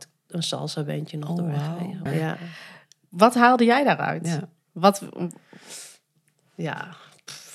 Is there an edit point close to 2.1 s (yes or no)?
yes